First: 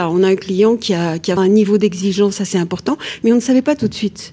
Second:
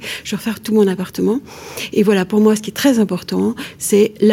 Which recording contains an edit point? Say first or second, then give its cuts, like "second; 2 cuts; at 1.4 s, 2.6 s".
first; 1 cut; at 1.4 s